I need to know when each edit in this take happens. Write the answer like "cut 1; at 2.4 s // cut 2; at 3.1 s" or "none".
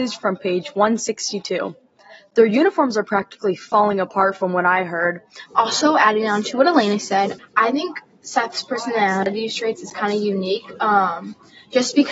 cut 1; at 5.5 s // cut 2; at 7.4 s